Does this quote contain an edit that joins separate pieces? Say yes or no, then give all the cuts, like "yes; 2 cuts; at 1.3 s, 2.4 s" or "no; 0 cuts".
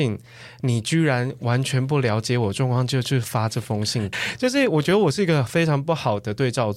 yes; 1 cut; at 4.1 s